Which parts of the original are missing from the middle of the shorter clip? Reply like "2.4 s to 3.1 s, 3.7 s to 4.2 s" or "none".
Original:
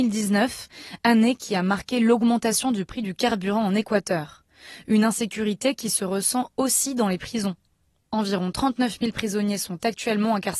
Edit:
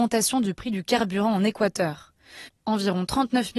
4.8 s to 7.9 s